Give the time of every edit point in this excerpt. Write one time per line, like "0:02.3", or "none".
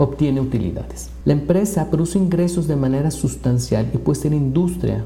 0:01.2